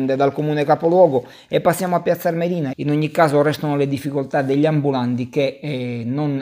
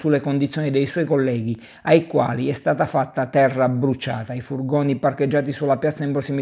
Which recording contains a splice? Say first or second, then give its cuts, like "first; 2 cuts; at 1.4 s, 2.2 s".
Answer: first; 1 cut; at 2.7 s